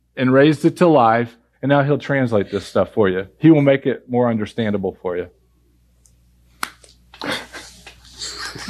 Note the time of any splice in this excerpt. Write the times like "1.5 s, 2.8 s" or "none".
1.5 s